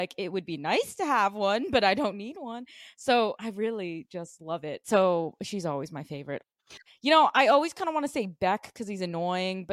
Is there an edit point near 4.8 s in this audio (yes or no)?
yes